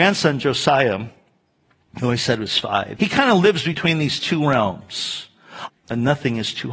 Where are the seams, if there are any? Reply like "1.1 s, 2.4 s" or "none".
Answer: 3.0 s, 5.7 s

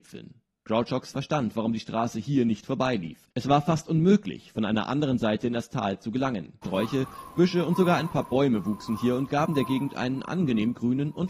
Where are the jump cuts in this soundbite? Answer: 6.6 s

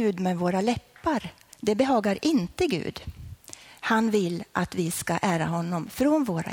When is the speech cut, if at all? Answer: 1.5 s

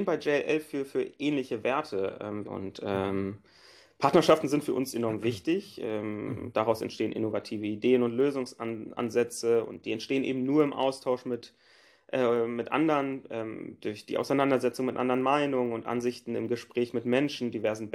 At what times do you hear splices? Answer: 2.4 s

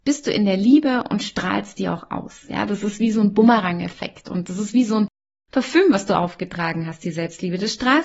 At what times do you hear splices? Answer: none

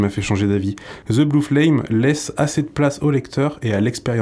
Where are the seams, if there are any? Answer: none

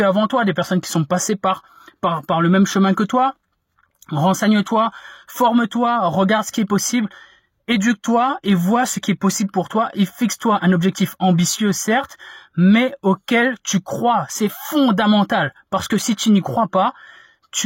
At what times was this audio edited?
none

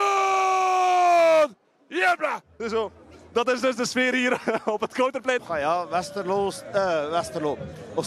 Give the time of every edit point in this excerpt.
2.6 s, 5.4 s

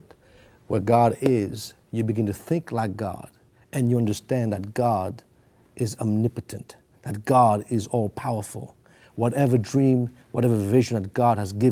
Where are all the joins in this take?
9.0 s

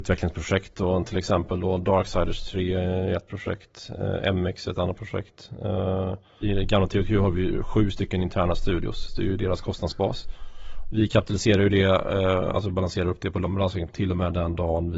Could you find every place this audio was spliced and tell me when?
6.4 s

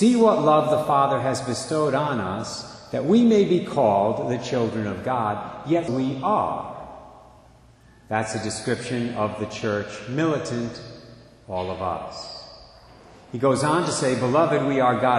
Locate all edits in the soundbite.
5.9 s

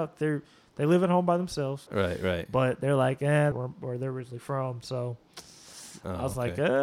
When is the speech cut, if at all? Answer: 1.9 s, 3.5 s

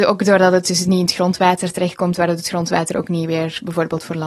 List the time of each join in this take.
none

